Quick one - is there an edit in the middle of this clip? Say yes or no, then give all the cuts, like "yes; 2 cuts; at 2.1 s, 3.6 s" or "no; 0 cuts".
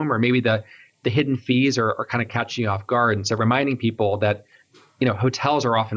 no; 0 cuts